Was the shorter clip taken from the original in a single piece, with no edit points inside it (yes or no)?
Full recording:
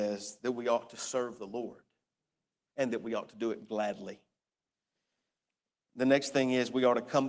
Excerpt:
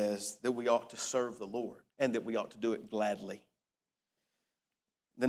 no